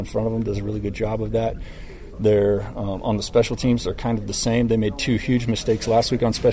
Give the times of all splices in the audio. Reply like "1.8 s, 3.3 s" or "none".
none